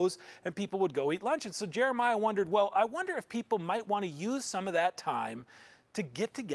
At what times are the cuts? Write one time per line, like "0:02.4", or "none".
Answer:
none